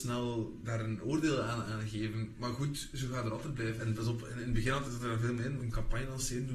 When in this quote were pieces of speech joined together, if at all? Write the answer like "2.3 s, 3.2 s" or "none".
3.8 s, 5.6 s